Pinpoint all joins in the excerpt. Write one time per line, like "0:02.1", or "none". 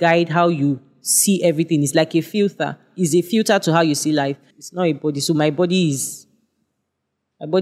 0:04.5

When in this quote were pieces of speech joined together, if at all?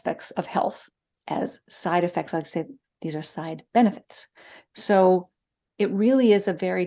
none

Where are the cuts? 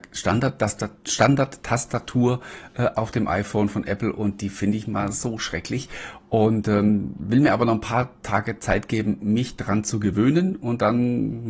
none

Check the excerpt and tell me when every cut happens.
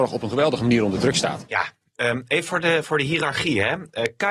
0:02.8

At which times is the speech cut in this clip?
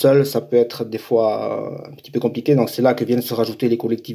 none

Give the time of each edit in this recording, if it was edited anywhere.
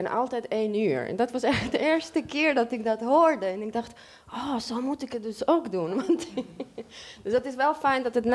none

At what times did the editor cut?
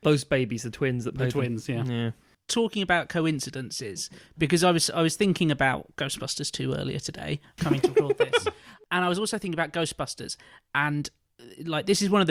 0:07.6

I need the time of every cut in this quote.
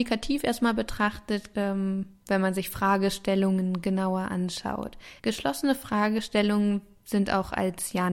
0:01.5
0:05.2

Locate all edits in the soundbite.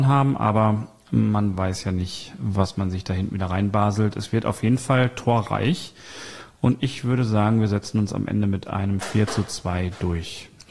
none

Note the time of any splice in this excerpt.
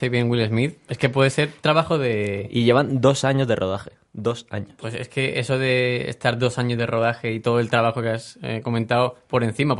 none

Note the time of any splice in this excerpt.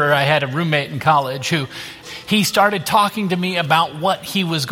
0:02.0

